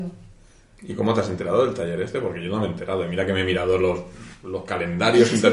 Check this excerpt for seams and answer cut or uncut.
uncut